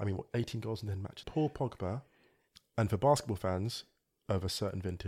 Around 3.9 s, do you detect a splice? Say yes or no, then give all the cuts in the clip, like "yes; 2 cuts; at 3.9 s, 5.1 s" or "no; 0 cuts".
no; 1 cut; at 1.2 s